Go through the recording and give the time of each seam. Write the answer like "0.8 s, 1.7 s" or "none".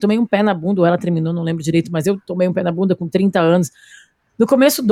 none